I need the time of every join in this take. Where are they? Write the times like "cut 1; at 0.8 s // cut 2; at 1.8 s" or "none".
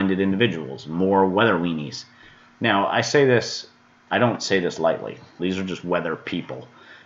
cut 1; at 5.4 s